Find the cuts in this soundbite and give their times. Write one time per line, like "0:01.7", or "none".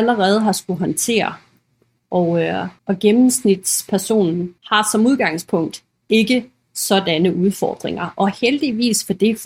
0:02.8
0:04.6